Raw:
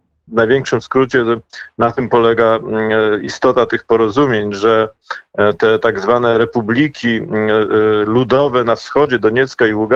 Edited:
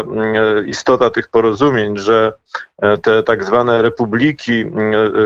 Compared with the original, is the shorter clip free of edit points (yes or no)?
yes